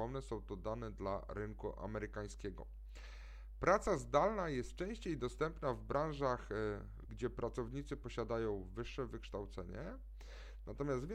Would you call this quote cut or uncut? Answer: cut